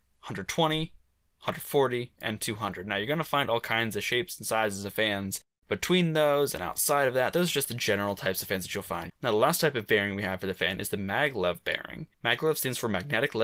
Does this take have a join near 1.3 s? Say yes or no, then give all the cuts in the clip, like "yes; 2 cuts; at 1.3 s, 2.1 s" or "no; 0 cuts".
no; 2 cuts; at 9.1 s, 12.1 s